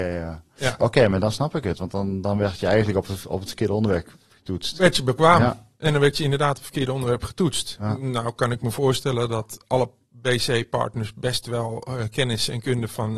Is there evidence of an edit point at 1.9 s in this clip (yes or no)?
no